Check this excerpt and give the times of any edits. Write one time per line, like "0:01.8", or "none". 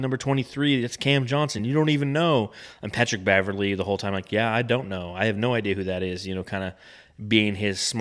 none